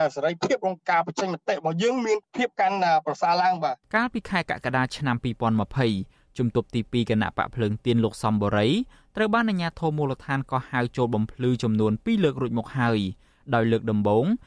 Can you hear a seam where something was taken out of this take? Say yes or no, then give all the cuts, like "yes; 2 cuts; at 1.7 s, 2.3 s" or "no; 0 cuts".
yes; 1 cut; at 3.8 s